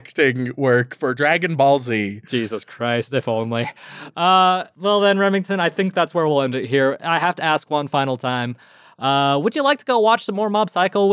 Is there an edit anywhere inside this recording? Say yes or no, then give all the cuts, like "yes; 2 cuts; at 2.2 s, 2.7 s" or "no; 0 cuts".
no; 0 cuts